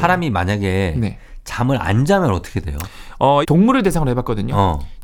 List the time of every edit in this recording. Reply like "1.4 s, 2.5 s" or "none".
3.4 s